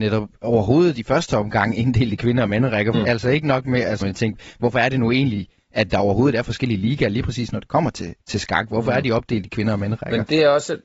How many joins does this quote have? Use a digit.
2